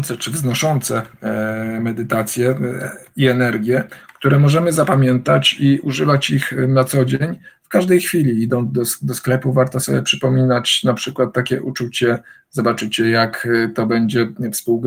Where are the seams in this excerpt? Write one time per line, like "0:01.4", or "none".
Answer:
none